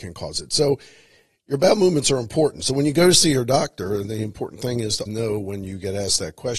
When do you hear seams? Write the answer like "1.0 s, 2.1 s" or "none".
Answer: 5.1 s